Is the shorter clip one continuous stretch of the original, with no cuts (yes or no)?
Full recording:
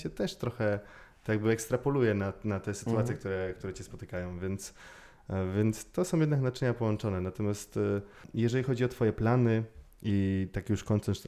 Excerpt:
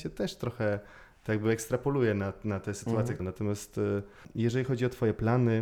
no